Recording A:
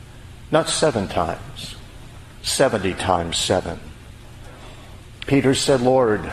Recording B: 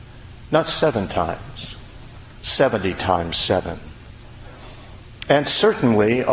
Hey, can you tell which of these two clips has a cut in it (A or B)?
A